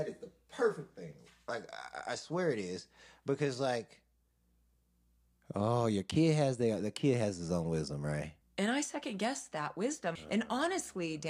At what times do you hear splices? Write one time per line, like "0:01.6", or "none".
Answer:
0:08.4
0:10.2